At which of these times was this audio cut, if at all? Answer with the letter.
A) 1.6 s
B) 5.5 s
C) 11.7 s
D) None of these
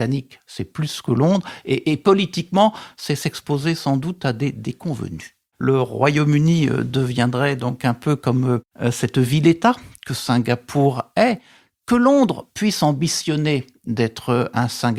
B